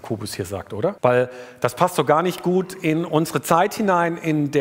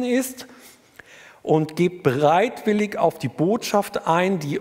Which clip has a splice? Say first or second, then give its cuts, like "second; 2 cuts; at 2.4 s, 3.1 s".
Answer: first; 1 cut; at 1.0 s